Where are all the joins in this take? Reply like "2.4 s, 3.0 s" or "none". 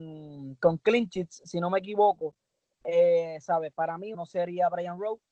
4.1 s